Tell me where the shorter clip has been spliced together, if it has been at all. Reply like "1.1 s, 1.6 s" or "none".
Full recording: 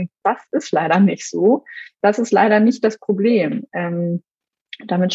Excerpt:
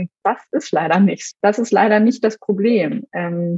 1.3 s